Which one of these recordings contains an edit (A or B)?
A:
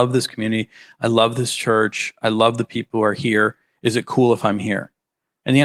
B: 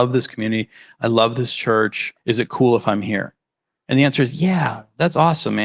B